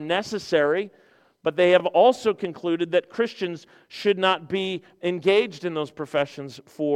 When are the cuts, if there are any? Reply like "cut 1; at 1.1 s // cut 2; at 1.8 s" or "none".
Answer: none